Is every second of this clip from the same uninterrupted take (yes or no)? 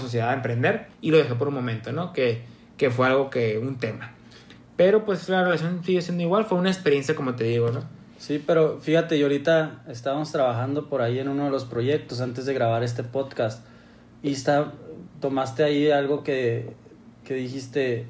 no